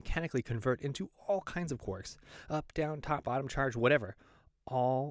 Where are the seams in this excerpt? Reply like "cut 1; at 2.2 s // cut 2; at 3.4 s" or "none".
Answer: cut 1; at 3.2 s